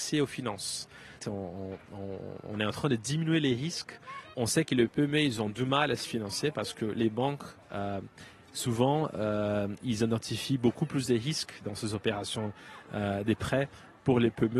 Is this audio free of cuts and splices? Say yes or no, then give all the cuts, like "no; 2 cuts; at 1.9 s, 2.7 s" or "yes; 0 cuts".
no; 1 cut; at 1.2 s